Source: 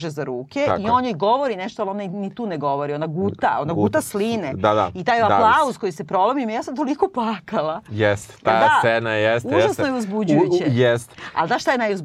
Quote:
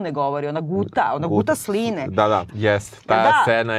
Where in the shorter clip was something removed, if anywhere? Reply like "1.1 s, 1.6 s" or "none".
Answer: 2.5 s

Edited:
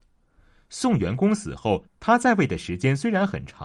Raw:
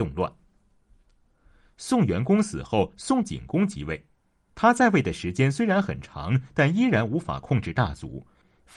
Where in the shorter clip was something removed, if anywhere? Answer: 1.9 s

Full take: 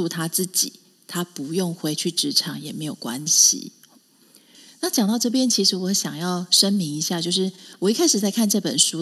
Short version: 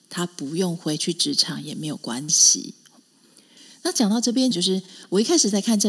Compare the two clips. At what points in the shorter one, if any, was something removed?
4.5 s

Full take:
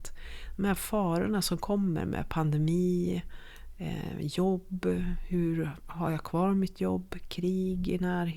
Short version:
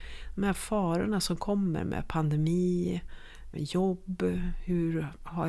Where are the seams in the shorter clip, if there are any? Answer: 3.5 s

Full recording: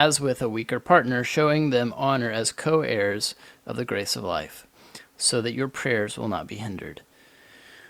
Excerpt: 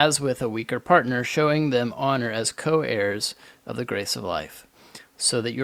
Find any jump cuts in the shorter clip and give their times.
none

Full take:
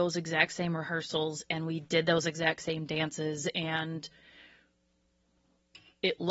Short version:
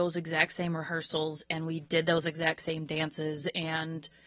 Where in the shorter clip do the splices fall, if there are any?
none

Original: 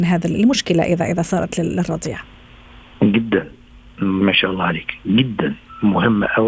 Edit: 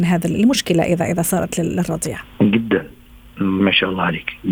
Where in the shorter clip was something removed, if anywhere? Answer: 2.3 s

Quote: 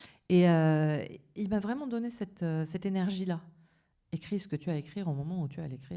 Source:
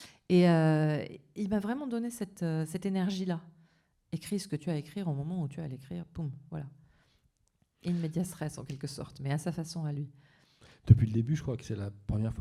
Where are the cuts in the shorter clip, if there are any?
none

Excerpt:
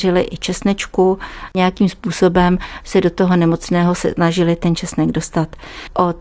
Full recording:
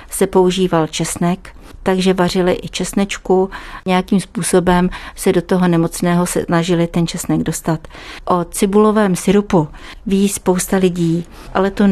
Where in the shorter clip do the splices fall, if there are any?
none

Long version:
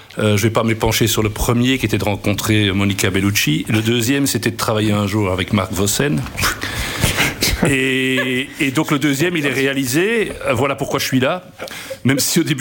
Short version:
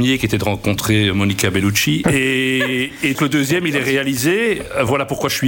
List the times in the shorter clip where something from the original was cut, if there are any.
2.0 s, 3.1 s

